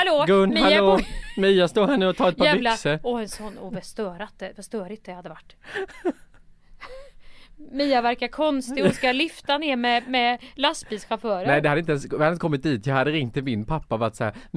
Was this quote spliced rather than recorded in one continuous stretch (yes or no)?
no